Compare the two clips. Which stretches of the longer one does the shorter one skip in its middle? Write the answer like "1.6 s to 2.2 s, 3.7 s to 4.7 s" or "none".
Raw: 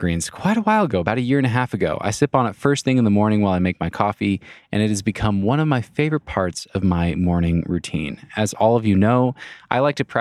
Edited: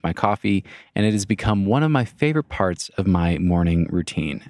none